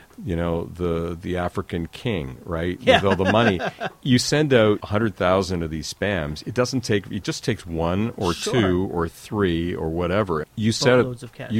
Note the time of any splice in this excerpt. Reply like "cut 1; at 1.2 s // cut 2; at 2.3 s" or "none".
cut 1; at 4.8 s // cut 2; at 10.4 s